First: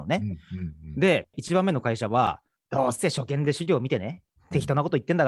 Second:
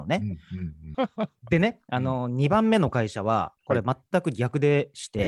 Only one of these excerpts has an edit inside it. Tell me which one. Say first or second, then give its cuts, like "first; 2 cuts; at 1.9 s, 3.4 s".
second; 1 cut; at 0.9 s